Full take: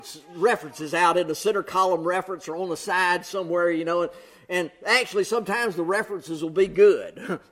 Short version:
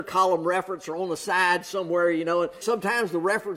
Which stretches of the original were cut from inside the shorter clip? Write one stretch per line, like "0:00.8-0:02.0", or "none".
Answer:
0:04.2-0:05.3